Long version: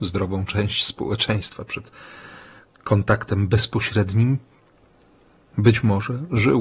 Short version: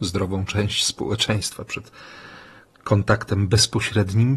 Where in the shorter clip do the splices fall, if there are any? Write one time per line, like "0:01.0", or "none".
none